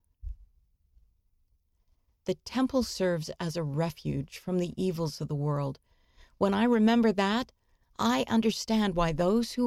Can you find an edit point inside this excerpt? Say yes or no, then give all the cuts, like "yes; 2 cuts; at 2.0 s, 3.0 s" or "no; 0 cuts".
no; 0 cuts